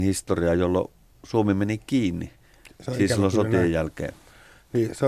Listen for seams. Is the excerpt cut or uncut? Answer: uncut